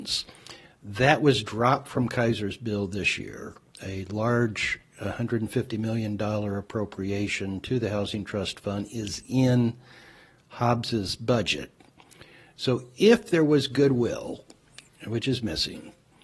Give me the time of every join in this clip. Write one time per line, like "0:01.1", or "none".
none